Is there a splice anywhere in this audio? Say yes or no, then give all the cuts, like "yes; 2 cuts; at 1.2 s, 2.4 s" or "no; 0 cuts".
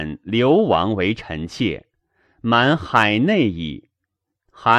no; 0 cuts